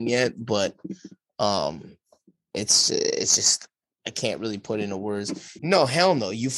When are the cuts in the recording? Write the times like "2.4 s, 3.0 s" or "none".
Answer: 5.6 s